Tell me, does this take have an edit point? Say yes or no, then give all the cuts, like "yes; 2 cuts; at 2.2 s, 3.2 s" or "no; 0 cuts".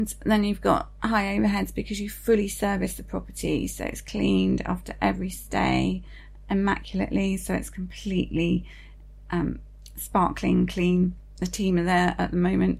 no; 0 cuts